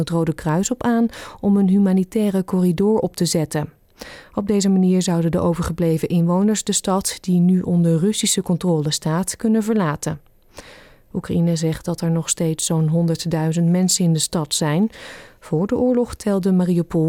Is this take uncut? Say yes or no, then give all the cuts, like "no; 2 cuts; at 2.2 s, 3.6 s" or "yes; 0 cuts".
yes; 0 cuts